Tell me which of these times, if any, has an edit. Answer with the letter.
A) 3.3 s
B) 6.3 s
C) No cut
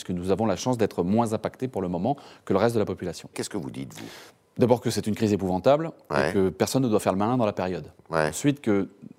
A